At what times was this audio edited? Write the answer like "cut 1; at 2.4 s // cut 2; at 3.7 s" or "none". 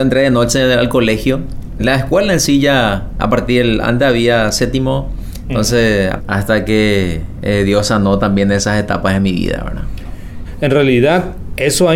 cut 1; at 1.8 s // cut 2; at 6.2 s